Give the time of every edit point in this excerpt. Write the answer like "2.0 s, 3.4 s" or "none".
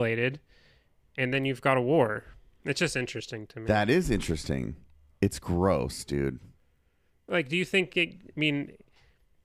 none